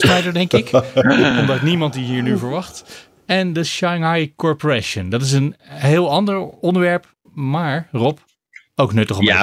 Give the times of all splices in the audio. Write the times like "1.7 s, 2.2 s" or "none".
none